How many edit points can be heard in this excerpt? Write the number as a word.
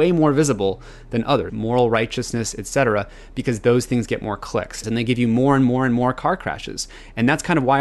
two